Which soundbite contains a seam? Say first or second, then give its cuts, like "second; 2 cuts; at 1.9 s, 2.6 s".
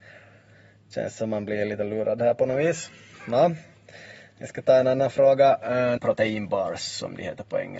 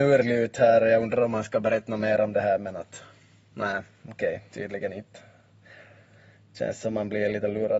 first; 1 cut; at 6.0 s